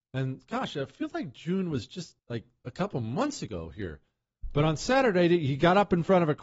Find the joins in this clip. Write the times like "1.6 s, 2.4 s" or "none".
2.2 s